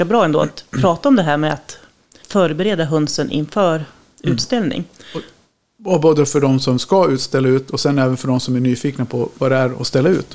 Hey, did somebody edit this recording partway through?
yes; 1 cut; at 2.2 s

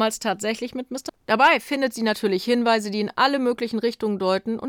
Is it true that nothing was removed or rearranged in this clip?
no; 1 cut; at 1.1 s

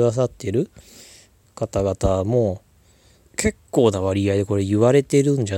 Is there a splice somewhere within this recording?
yes; 1 cut; at 3.2 s

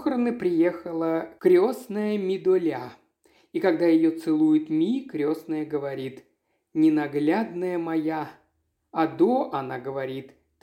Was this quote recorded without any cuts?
yes; 0 cuts

